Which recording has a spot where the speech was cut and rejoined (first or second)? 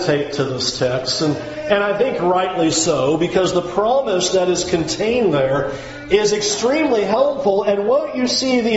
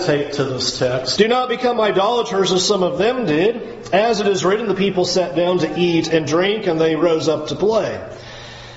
second